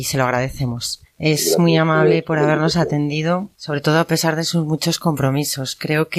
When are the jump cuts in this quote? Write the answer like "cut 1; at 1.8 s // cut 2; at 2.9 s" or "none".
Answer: cut 1; at 1.0 s // cut 2; at 3.5 s

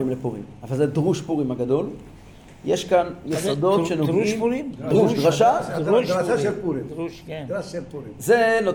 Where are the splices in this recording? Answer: cut 1; at 4.7 s

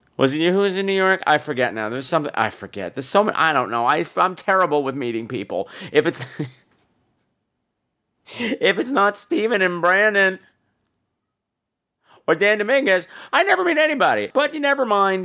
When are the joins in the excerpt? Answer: cut 1; at 13.3 s // cut 2; at 14.3 s

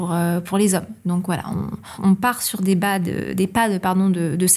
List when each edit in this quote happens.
none

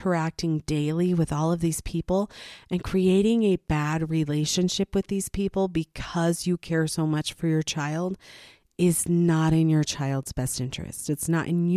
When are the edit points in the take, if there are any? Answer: none

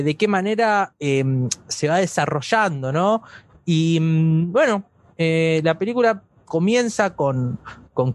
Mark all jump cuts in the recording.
cut 1; at 3.5 s

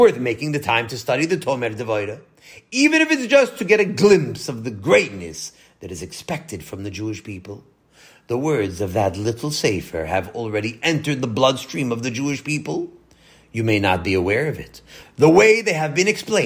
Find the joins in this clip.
cut 1; at 15.0 s

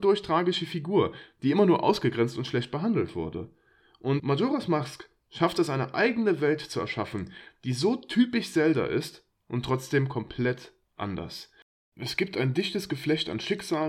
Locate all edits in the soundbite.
cut 1; at 4.2 s

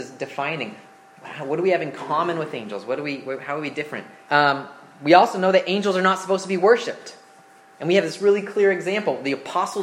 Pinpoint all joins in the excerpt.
cut 1; at 4.3 s

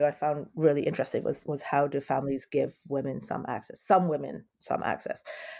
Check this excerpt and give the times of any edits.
none

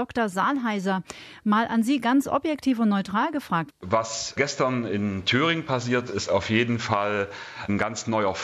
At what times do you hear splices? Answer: cut 1; at 3.7 s // cut 2; at 6.1 s

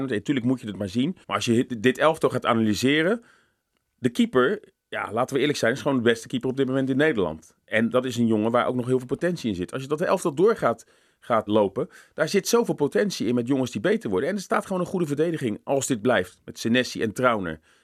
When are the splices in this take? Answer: cut 1; at 1.2 s // cut 2; at 11.5 s

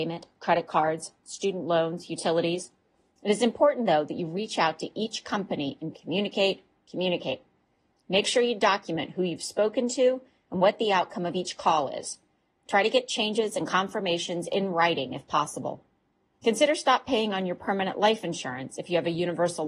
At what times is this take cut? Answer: cut 1; at 5.9 s // cut 2; at 16.4 s

